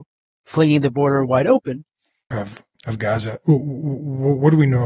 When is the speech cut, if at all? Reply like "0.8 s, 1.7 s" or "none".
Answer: 2.3 s